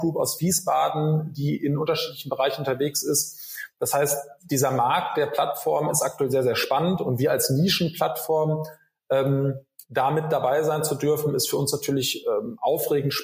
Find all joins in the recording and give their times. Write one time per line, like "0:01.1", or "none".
none